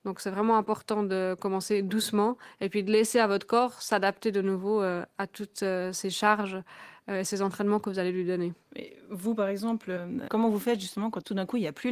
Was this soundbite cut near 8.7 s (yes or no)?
no